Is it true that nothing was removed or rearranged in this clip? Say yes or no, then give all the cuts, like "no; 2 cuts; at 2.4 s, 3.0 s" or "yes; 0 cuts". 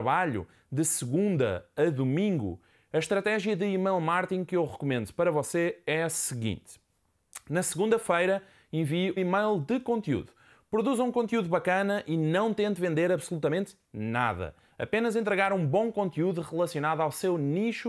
no; 1 cut; at 9.2 s